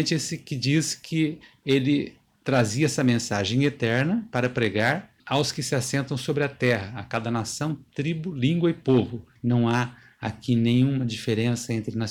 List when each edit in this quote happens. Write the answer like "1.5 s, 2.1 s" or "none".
5.2 s, 9.4 s